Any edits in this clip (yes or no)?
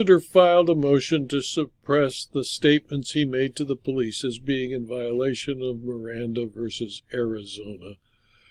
no